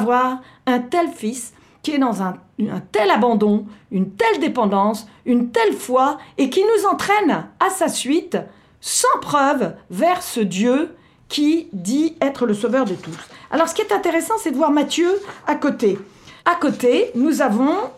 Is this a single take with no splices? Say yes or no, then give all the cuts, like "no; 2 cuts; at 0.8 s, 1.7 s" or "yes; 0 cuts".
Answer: no; 1 cut; at 16.4 s